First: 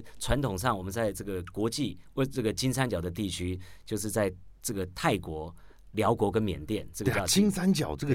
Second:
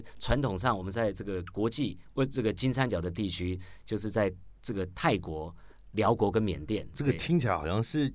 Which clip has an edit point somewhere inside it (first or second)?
second